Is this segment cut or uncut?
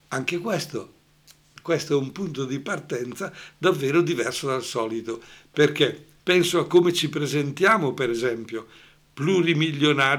cut